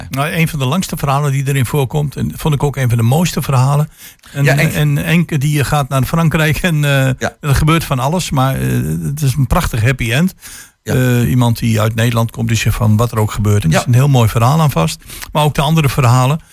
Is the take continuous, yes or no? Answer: no